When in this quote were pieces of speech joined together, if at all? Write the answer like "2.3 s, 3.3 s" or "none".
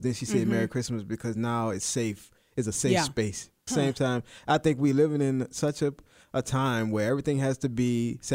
3.7 s